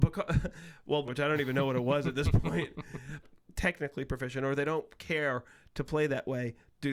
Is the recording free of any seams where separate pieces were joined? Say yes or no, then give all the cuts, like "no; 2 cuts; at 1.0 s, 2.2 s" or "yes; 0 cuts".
no; 2 cuts; at 1.1 s, 3.2 s